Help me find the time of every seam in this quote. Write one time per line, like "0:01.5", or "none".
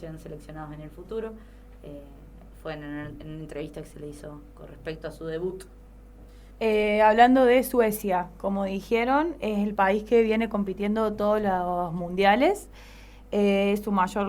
0:06.5